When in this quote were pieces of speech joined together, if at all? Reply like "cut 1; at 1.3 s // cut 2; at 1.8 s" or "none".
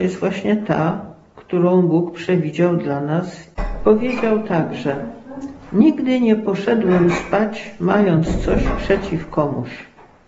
none